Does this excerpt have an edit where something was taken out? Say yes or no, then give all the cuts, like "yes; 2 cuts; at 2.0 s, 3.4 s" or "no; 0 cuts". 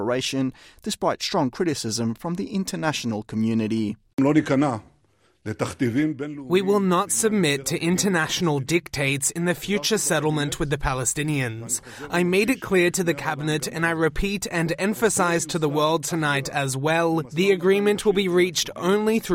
no; 0 cuts